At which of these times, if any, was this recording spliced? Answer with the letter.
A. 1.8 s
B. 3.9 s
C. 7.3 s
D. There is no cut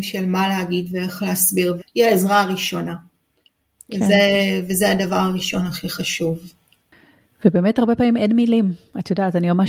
A